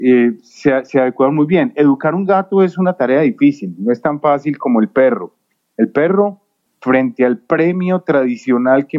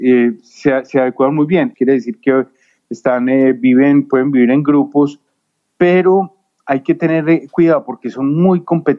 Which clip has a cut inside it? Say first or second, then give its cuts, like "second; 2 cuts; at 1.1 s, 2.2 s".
second; 1 cut; at 1.7 s